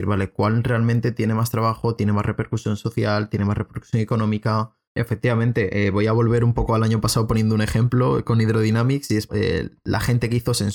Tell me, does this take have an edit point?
yes; 2 cuts; at 4.9 s, 9.3 s

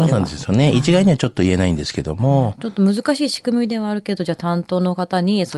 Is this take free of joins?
yes; 0 cuts

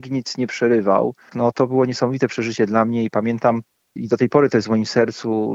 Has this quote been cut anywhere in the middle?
yes; 1 cut; at 1.3 s

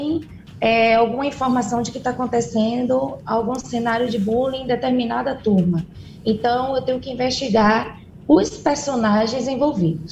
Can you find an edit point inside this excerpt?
no; 0 cuts

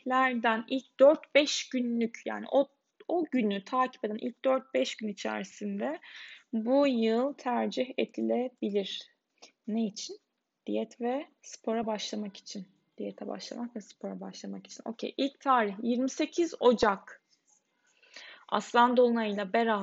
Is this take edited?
yes; 1 cut; at 11.4 s

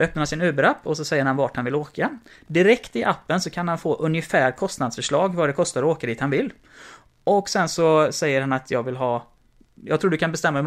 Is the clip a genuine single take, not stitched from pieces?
yes; 0 cuts

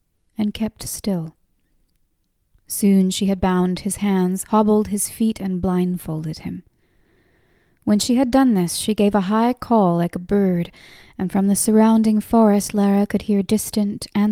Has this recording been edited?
no; 0 cuts

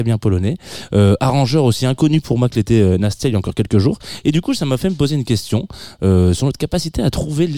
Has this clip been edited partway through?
no; 0 cuts

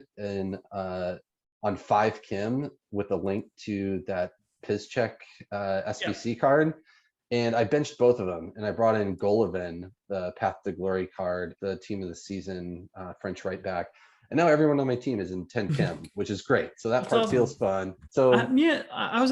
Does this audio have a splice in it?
yes; 2 cuts; at 11.6 s, 18.0 s

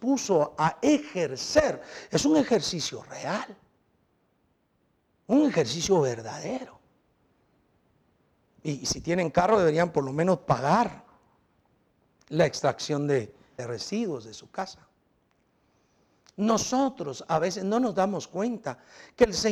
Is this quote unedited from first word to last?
no; 2 cuts; at 8.4 s, 13.6 s

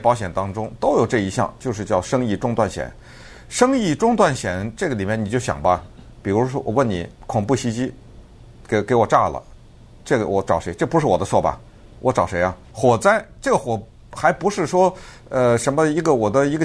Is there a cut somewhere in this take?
yes; 1 cut; at 12.7 s

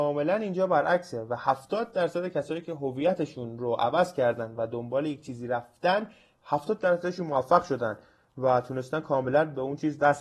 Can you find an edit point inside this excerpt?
no; 0 cuts

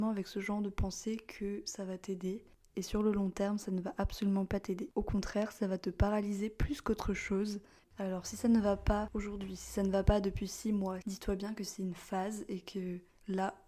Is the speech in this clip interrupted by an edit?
yes; 2 cuts; at 7.8 s, 11.0 s

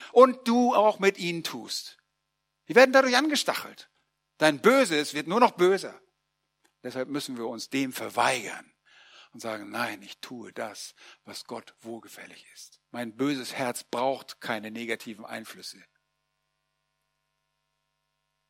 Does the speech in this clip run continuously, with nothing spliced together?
no; 1 cut; at 12.9 s

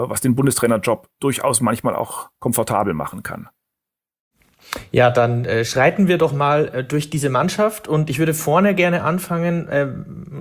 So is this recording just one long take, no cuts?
yes; 0 cuts

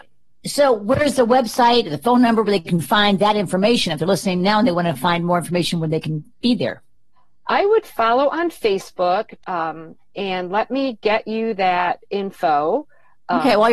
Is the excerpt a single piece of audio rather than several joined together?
no; 1 cut; at 9.4 s

